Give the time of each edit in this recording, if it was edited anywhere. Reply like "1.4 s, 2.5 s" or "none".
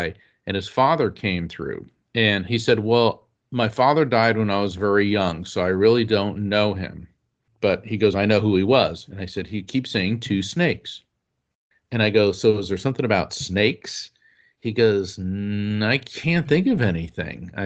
none